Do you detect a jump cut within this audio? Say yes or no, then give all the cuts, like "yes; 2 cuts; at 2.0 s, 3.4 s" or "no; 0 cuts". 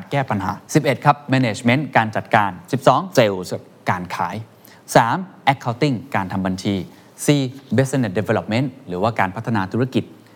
yes; 1 cut; at 3.2 s